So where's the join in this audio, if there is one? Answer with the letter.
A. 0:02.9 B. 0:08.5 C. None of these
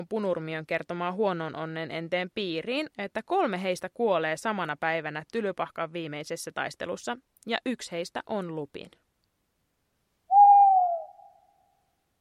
A